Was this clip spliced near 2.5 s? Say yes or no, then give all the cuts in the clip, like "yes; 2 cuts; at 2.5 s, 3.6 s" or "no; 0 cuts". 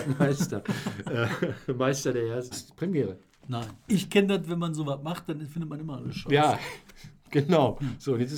yes; 2 cuts; at 2.5 s, 3.9 s